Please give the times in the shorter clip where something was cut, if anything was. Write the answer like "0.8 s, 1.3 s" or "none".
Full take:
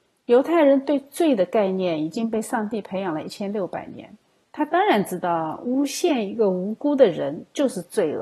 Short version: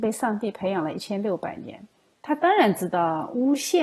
none